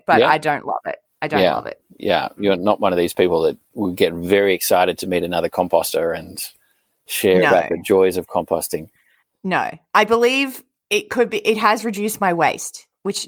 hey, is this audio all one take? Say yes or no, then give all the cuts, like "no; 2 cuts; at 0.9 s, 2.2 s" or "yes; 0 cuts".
yes; 0 cuts